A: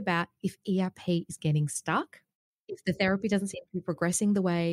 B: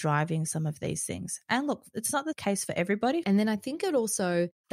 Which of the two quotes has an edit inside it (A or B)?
B